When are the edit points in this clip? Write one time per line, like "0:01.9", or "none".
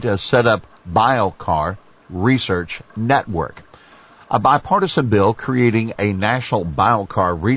none